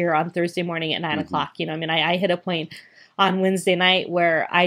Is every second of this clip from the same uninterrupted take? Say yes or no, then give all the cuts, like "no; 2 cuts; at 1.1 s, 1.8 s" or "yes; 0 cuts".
yes; 0 cuts